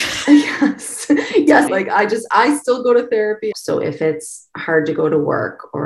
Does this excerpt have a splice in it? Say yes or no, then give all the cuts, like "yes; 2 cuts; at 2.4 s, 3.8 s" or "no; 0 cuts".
yes; 2 cuts; at 1.7 s, 3.5 s